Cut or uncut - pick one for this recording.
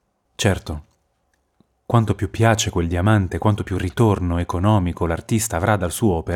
uncut